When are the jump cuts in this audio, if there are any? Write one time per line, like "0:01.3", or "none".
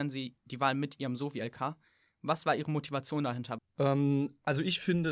0:03.6